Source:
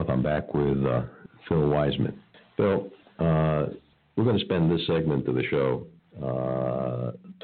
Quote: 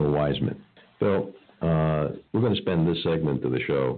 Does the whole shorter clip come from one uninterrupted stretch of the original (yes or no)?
no